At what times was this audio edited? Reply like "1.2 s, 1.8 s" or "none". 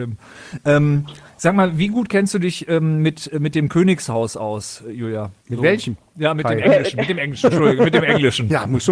5.4 s